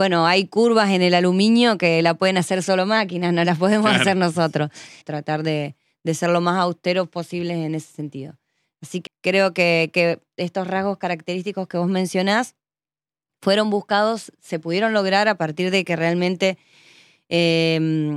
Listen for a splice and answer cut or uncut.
cut